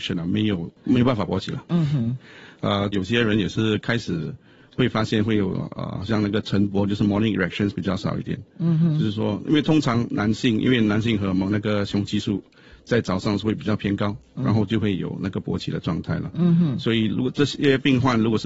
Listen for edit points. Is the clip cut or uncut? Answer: cut